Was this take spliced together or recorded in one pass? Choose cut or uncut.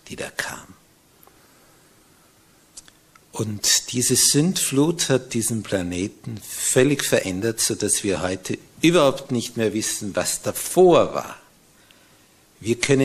uncut